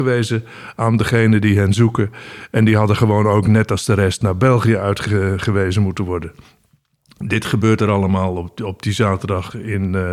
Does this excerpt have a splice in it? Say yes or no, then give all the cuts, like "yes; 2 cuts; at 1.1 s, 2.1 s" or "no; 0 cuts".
no; 0 cuts